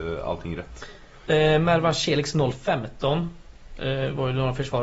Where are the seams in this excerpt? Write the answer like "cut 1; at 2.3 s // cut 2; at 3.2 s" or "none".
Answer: cut 1; at 1.3 s